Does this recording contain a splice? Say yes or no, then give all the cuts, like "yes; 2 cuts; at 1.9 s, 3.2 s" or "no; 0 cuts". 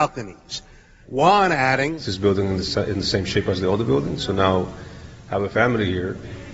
yes; 1 cut; at 1.0 s